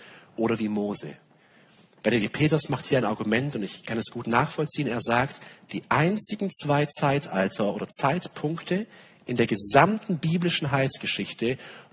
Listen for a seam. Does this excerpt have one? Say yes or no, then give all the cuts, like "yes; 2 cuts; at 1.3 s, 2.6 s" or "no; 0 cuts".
no; 0 cuts